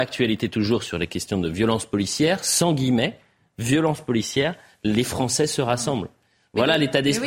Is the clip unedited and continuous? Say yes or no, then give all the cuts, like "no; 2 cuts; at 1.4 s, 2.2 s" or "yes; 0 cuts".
yes; 0 cuts